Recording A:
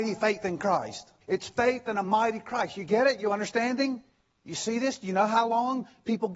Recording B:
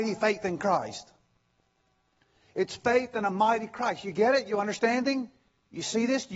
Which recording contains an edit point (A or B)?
A